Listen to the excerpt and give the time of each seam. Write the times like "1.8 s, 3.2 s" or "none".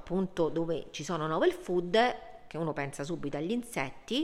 none